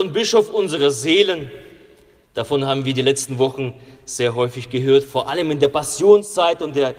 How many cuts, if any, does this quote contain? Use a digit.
0